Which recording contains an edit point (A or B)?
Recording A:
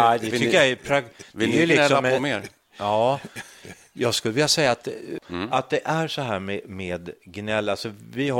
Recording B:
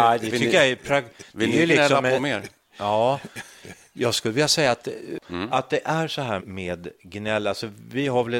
B